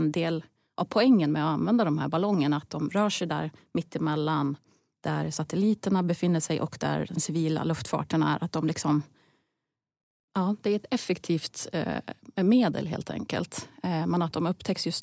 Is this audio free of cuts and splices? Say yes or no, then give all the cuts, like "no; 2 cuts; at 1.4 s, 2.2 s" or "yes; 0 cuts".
yes; 0 cuts